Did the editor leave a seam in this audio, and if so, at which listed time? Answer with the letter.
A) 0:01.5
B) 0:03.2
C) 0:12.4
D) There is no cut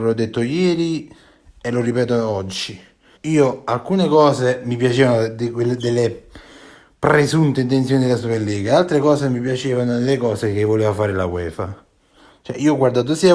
B